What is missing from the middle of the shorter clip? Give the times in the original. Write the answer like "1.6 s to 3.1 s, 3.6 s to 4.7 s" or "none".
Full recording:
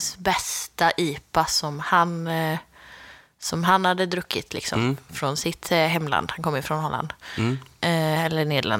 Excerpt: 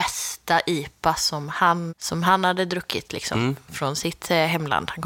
2.2 s to 3.3 s